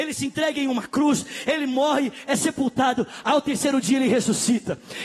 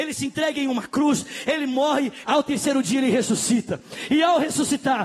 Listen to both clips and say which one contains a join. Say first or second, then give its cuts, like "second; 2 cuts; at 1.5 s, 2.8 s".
second; 1 cut; at 2.2 s